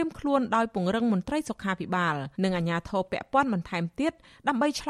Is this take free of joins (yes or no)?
no